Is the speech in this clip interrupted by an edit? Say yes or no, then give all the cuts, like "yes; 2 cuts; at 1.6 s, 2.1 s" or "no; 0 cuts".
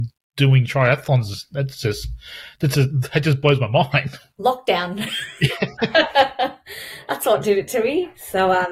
no; 0 cuts